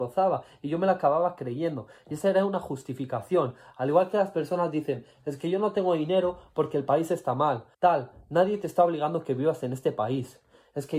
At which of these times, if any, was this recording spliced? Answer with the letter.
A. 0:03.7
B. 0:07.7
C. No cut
B